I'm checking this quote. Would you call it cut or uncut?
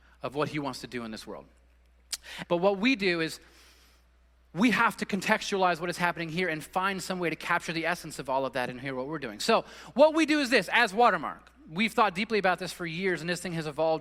cut